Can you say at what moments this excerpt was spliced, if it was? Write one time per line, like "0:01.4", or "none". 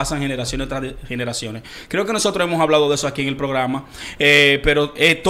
none